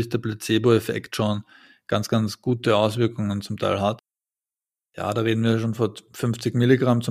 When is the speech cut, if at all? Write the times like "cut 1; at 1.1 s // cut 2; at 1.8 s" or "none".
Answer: cut 1; at 4.8 s